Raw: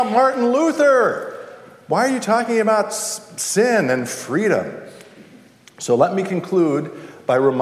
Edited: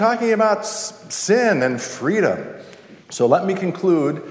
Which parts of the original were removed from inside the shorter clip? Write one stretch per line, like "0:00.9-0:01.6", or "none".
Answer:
0:05.3-0:05.7